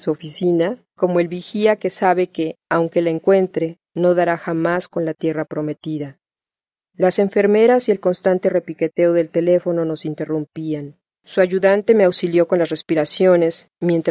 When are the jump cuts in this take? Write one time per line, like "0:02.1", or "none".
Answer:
0:06.8
0:11.2